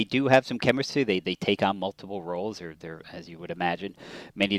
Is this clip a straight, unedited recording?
yes; 0 cuts

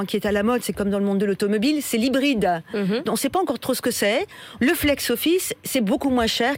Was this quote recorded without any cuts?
no; 2 cuts; at 3.1 s, 4.6 s

